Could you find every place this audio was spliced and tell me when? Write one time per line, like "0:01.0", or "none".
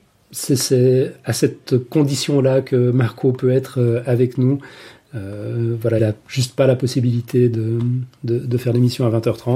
0:06.0